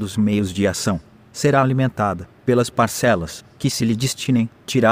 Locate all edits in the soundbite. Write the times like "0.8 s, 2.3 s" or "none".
2.4 s